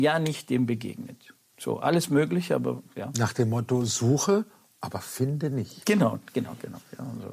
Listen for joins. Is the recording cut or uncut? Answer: uncut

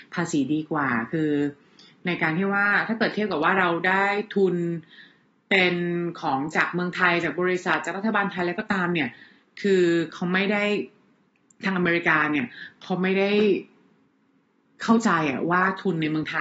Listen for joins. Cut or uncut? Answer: uncut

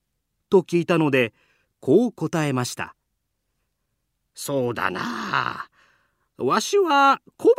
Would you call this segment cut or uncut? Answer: cut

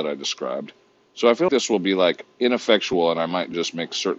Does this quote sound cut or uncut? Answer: cut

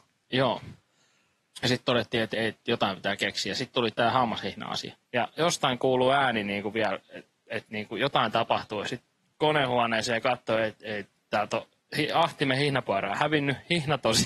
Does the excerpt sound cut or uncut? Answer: cut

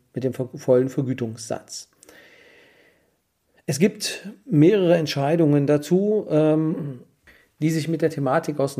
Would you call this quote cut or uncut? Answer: uncut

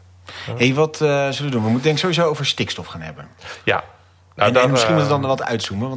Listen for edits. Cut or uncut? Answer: uncut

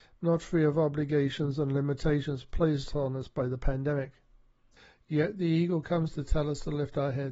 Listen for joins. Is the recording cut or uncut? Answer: uncut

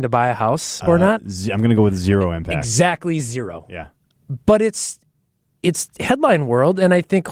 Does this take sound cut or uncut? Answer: uncut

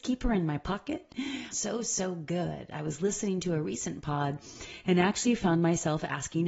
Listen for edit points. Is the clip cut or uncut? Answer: cut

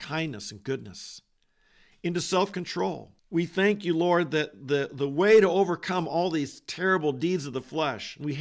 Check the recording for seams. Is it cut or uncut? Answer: cut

